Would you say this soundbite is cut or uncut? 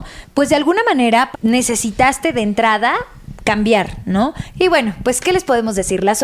cut